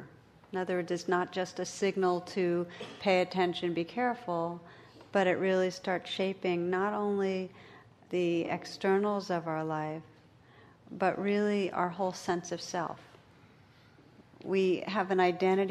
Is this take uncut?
yes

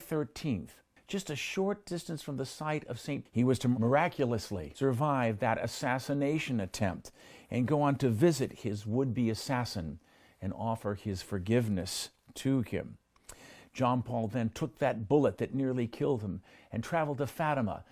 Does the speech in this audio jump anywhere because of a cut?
yes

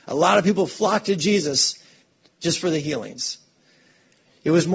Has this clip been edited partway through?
no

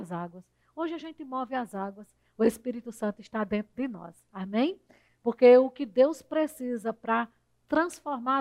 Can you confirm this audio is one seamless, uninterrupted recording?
no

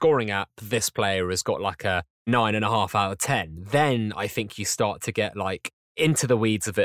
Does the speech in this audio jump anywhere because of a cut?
no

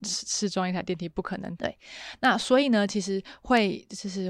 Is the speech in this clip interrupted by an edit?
yes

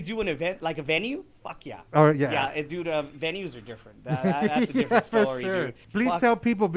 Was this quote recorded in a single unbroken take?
no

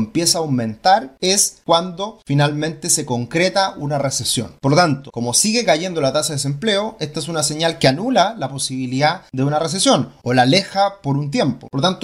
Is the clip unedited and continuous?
yes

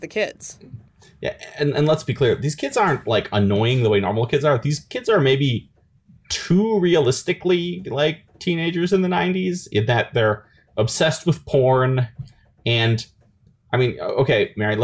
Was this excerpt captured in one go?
yes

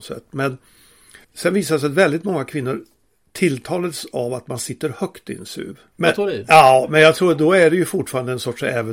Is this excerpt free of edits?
no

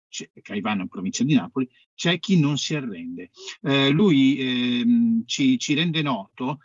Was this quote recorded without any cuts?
yes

